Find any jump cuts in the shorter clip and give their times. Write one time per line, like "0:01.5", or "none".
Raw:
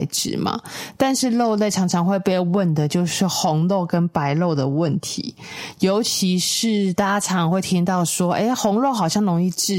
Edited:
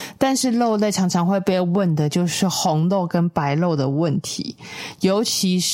none